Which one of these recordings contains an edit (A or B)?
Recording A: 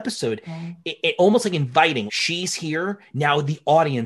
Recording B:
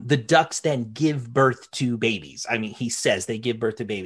A